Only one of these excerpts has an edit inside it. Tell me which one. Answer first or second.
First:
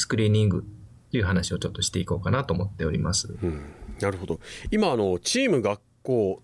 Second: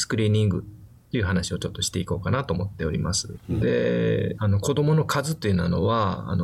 second